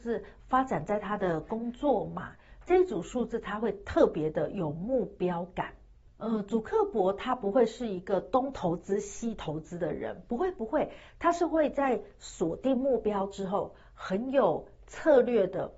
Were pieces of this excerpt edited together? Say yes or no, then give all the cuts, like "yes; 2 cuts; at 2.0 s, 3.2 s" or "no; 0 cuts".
no; 0 cuts